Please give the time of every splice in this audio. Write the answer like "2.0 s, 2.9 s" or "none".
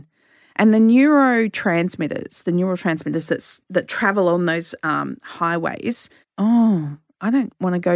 6.2 s

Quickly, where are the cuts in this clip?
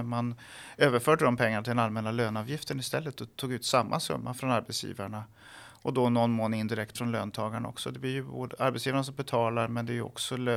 none

